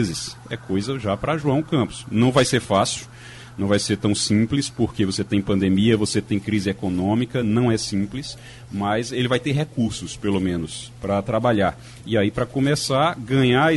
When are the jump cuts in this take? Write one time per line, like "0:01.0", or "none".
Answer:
none